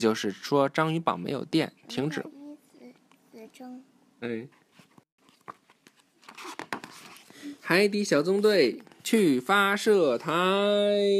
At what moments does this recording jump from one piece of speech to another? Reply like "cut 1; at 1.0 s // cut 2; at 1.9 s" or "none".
cut 1; at 4.2 s